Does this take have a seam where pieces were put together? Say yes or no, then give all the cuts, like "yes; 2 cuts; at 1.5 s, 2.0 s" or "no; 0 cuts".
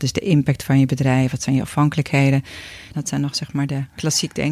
yes; 1 cut; at 2.9 s